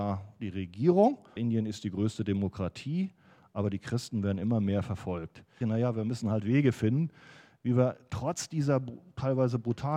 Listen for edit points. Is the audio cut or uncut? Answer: cut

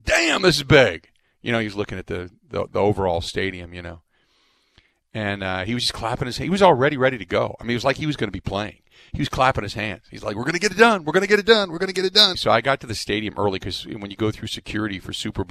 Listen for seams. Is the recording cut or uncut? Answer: cut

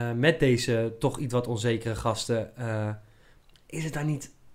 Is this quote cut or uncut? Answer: uncut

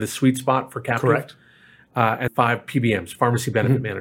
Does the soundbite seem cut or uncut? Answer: cut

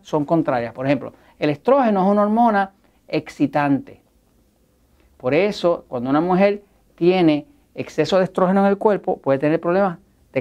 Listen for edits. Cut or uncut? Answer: uncut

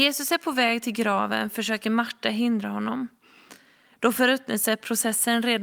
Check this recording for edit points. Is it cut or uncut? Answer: uncut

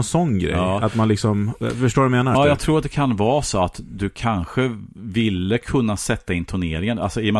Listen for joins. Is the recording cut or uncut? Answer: cut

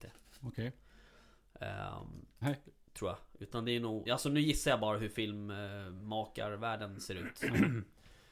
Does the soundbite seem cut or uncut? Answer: cut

